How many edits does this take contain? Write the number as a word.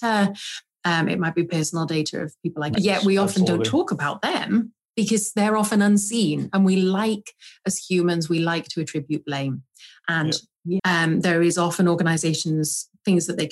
two